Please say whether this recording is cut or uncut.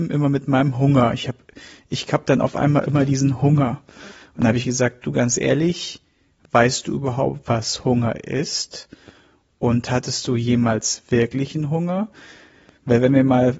uncut